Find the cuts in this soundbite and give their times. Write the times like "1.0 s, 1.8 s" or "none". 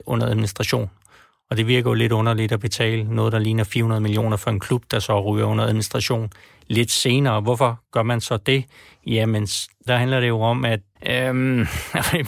9.9 s, 11.0 s